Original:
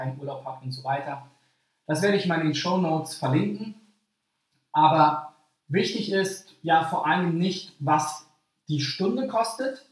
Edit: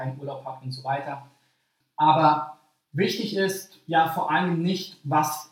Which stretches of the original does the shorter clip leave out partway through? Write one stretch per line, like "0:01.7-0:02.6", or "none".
0:01.8-0:04.6